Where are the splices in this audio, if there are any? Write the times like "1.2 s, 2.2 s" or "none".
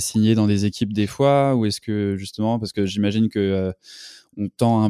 none